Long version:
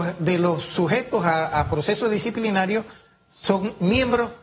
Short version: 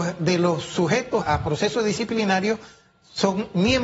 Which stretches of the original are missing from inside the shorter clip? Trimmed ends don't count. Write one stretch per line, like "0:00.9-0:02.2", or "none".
0:01.2-0:01.5